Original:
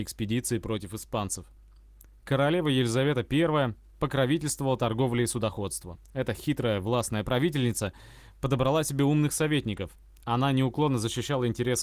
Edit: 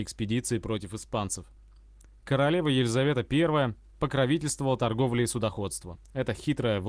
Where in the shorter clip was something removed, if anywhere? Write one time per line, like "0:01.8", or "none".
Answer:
none